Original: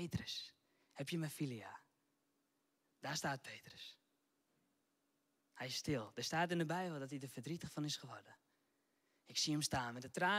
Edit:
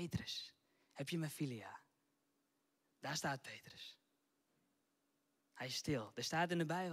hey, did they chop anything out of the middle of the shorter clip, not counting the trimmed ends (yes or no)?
no